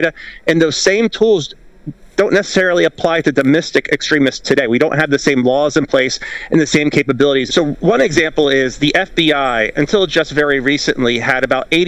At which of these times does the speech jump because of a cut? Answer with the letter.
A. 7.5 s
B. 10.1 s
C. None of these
A